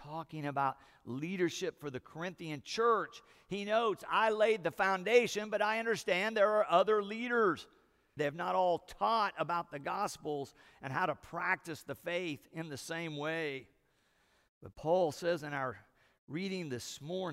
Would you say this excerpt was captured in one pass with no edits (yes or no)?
no